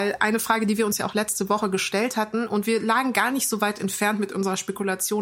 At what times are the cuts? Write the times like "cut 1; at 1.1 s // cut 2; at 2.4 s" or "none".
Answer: none